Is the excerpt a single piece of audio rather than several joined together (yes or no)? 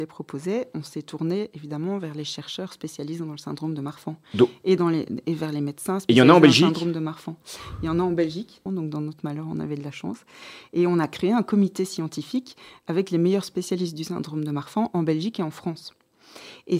no